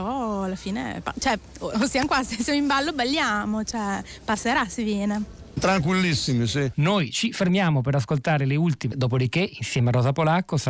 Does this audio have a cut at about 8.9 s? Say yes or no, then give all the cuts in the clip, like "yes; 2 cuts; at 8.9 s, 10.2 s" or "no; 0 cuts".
yes; 2 cuts; at 6.7 s, 8.9 s